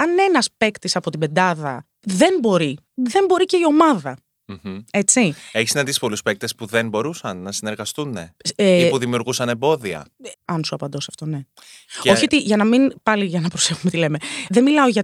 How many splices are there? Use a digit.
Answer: 1